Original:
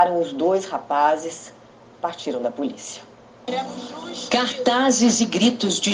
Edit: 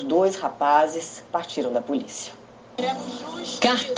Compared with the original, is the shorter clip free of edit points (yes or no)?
no